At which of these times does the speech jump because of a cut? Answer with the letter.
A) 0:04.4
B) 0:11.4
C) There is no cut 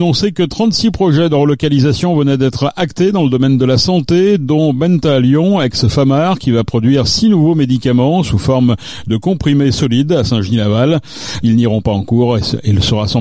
B